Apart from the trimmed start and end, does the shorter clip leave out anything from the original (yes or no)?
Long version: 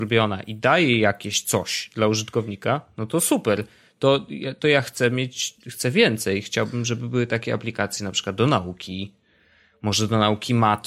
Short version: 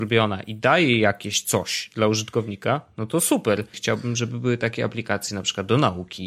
yes